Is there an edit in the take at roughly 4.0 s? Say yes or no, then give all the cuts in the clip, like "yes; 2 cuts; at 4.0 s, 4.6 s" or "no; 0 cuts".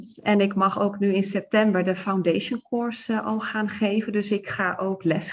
no; 0 cuts